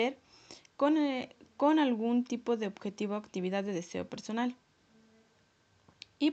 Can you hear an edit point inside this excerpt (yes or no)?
no